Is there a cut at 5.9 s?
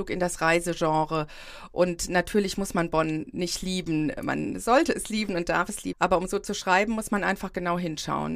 yes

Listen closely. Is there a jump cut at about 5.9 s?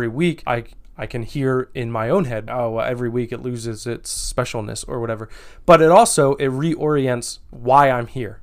no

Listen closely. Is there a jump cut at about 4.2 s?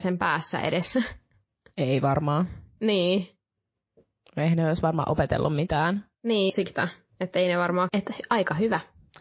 no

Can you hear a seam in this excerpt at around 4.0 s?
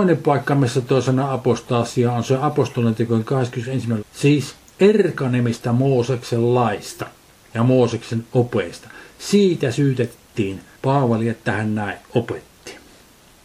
yes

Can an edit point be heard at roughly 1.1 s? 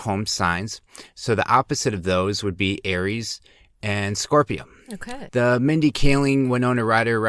no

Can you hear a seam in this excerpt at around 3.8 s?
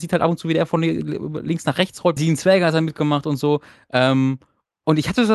no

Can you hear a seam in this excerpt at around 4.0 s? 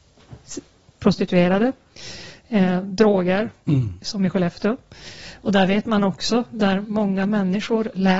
yes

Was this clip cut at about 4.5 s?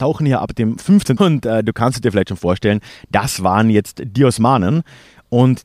no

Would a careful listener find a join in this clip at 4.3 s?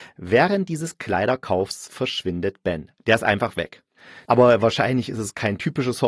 yes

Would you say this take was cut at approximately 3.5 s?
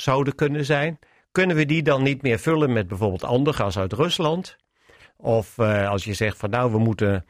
yes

